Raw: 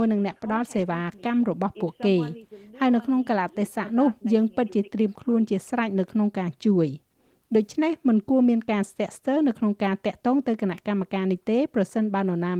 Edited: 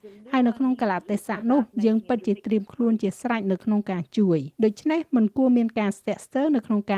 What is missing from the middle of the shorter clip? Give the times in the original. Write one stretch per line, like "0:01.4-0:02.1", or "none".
0:07.0-0:07.5